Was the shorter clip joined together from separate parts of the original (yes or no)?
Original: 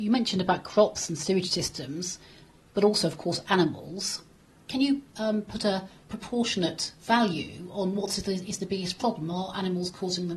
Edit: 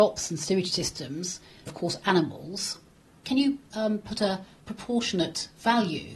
yes